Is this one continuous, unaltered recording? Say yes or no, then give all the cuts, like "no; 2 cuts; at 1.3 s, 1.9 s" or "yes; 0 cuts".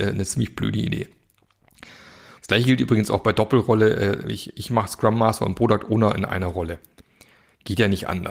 no; 1 cut; at 2.4 s